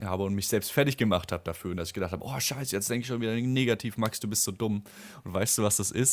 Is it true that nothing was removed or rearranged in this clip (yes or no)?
yes